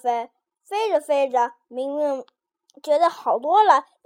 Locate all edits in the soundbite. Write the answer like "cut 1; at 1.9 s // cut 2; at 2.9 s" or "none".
none